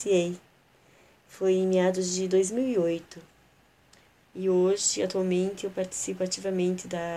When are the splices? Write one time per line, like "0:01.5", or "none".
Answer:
0:04.2